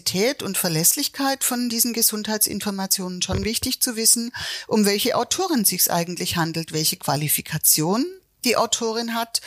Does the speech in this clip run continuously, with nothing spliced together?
yes; 0 cuts

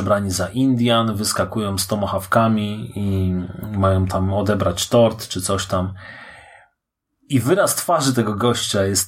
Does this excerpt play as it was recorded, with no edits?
yes; 0 cuts

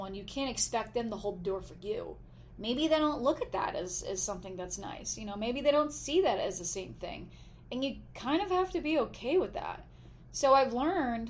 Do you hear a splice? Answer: no; 0 cuts

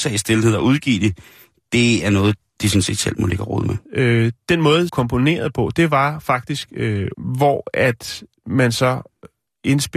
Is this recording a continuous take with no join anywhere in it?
no; 3 cuts; at 3.9 s, 4.9 s, 7.1 s

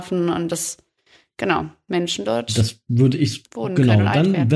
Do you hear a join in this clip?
no; 0 cuts

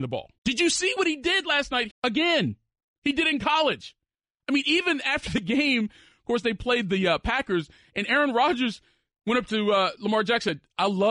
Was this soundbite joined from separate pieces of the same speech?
yes; 1 cut; at 1.9 s

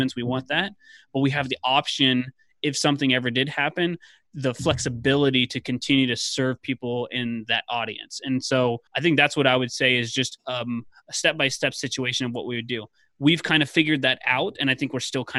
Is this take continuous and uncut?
no; 1 cut; at 8.9 s

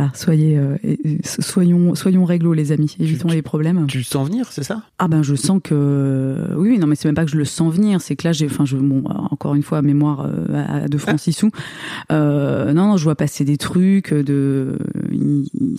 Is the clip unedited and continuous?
no; 1 cut; at 4.9 s

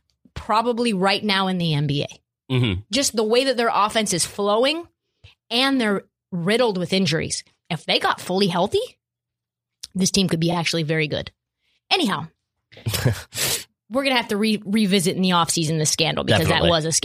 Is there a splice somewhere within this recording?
no; 0 cuts

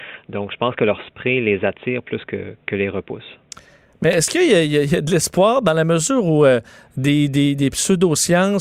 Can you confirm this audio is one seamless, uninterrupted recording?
yes; 0 cuts

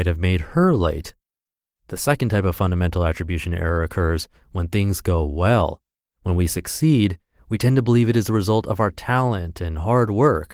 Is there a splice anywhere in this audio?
no; 0 cuts

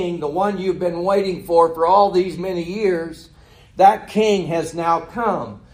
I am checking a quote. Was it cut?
yes; 1 cut; at 2.4 s

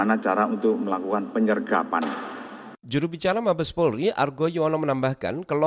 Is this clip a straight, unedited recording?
yes; 0 cuts

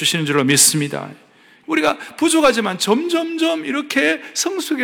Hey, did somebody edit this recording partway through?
yes; 1 cut; at 1.6 s

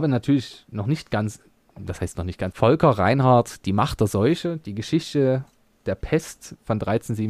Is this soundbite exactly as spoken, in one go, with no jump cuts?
no; 1 cut; at 2.5 s

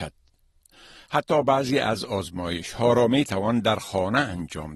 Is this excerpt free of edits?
no; 1 cut; at 0.9 s

